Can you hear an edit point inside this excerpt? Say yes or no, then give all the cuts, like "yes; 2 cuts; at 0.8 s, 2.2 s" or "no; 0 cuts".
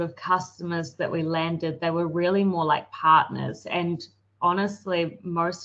no; 0 cuts